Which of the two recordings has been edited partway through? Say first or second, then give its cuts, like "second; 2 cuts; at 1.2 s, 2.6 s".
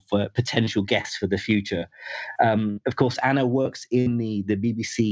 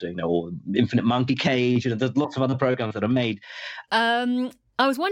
second; 1 cut; at 3.9 s